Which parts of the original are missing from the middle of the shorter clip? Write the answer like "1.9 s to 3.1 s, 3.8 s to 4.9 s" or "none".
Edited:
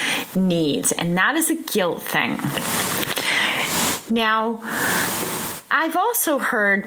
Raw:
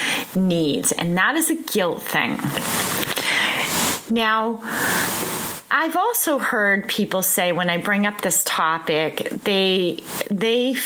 none